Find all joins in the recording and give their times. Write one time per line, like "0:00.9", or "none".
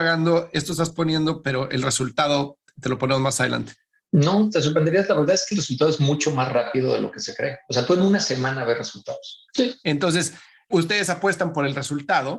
0:09.5